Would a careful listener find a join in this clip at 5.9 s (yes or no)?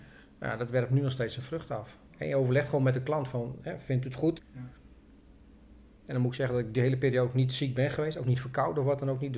no